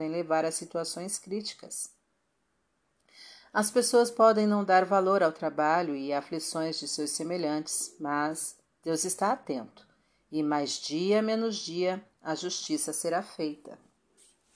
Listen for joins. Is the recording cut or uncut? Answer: uncut